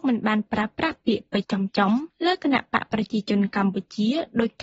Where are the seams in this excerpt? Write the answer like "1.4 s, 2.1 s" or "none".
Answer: 1.4 s